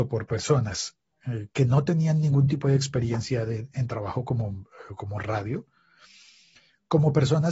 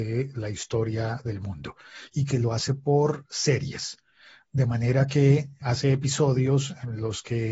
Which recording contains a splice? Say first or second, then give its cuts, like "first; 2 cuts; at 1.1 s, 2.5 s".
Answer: second; 1 cut; at 5.6 s